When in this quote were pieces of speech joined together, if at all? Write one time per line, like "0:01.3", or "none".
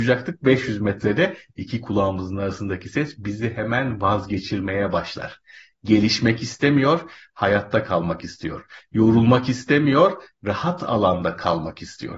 none